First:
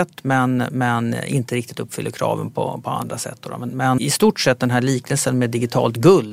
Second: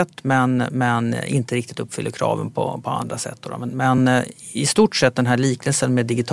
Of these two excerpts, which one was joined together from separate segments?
first; 1 cut; at 4.0 s

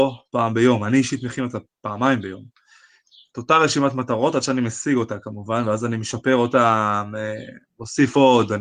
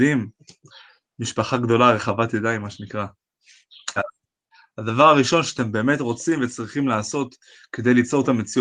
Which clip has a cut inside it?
second; 1 cut; at 4.0 s

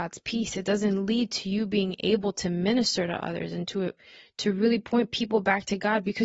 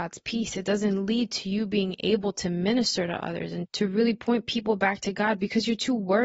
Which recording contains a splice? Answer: second; 1 cut; at 3.7 s

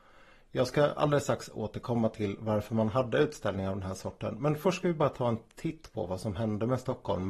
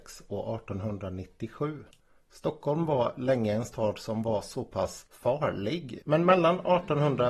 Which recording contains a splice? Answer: second; 1 cut; at 6.0 s

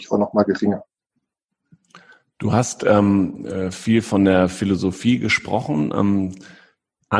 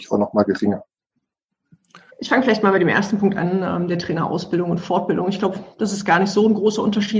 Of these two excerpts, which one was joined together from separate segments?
second; 1 cut; at 2.1 s

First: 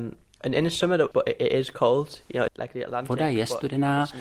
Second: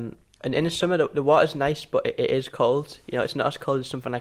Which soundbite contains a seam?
first; 2 cuts; at 1.1 s, 2.5 s

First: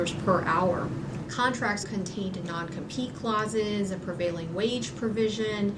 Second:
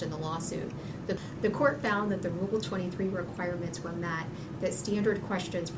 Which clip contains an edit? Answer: first; 1 cut; at 1.8 s

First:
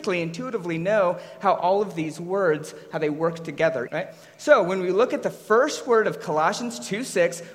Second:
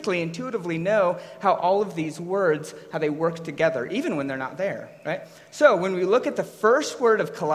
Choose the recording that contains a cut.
first; 1 cut; at 3.9 s

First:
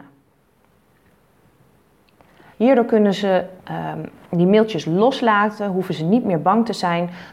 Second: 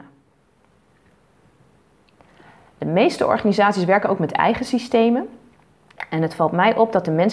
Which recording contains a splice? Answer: first; 1 cut; at 2.5 s

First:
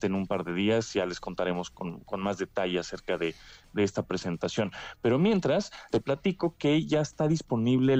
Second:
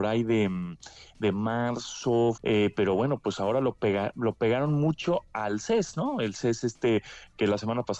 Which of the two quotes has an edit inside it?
second; 1 cut; at 2.4 s

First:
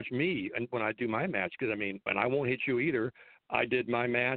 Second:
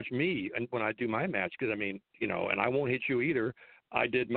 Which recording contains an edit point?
first; 1 cut; at 2.1 s

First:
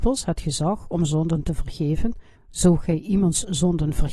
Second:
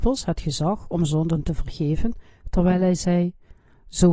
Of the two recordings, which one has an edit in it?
first; 1 cut; at 2.4 s

